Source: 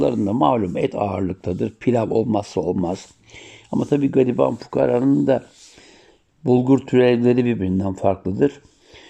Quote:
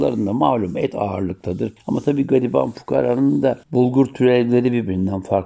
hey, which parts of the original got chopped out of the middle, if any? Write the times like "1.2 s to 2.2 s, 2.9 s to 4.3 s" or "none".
1.8 s to 3.6 s, 5.5 s to 6.4 s